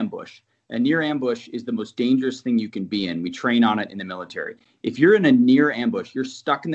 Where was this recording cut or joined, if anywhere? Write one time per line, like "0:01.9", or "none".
none